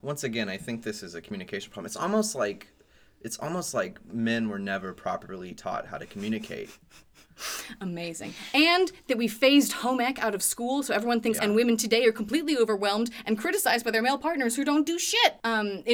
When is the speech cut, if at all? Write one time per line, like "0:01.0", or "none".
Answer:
0:11.4